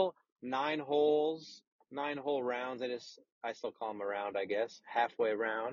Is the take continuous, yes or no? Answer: yes